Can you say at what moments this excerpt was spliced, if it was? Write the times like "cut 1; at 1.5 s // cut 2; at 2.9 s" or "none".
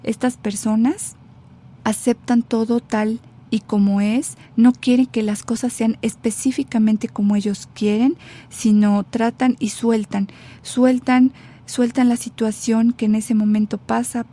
cut 1; at 1.8 s